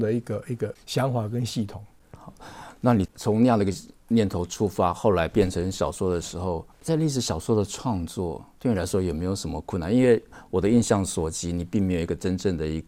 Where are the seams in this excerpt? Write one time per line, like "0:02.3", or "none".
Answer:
0:03.1
0:06.7